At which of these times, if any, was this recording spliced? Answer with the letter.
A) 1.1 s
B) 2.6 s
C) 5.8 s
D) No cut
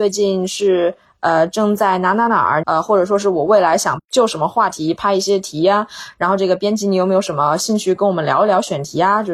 B